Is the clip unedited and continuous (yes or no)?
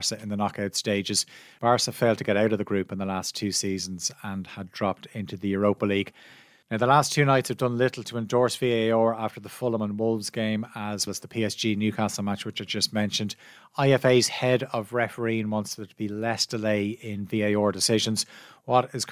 no